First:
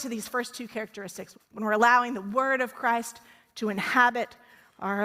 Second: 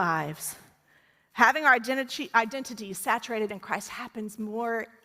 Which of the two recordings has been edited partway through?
first; 1 cut; at 1.3 s

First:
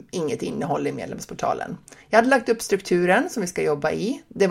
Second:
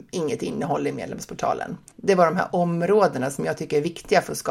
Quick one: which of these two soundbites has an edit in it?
second; 1 cut; at 1.9 s

